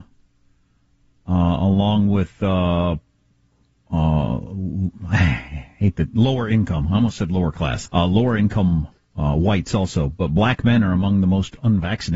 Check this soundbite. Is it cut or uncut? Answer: cut